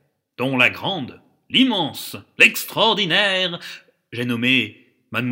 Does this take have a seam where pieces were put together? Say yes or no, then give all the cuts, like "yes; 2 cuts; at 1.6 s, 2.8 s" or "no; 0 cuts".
no; 0 cuts